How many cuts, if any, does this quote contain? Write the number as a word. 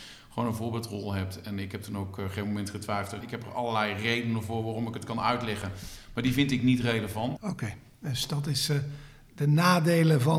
two